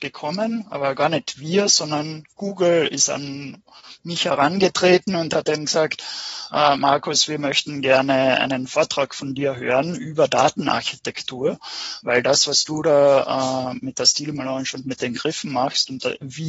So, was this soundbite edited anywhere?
no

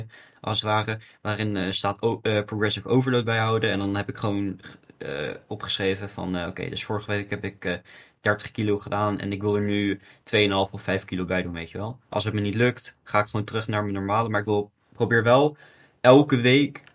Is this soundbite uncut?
yes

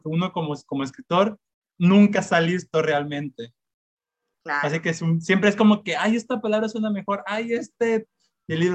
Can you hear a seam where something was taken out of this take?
yes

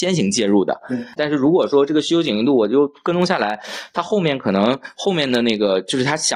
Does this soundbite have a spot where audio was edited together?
yes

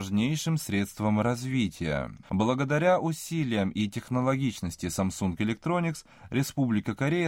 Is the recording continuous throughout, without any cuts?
no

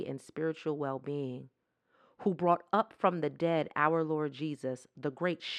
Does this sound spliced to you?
no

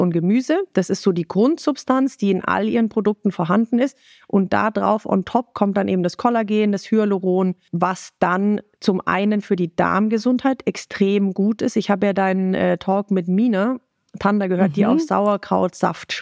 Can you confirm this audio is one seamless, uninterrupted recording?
yes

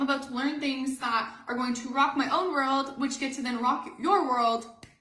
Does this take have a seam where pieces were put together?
no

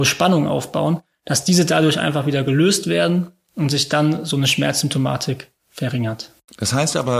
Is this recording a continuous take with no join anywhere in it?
no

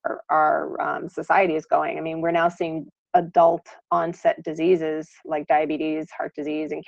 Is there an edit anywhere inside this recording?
no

